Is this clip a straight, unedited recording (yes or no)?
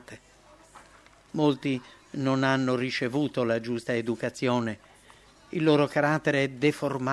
yes